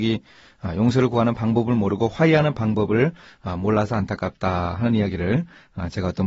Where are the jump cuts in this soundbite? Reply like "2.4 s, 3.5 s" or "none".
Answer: none